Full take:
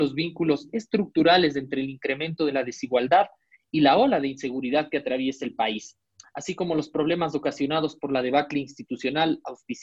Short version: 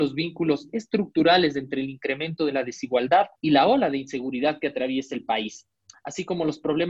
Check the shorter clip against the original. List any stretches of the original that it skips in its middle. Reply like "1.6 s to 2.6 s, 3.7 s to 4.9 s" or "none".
3.4 s to 3.7 s